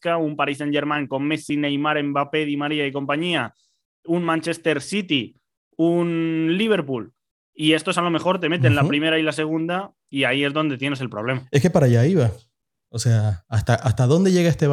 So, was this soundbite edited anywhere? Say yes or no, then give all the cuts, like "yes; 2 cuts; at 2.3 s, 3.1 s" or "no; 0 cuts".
no; 0 cuts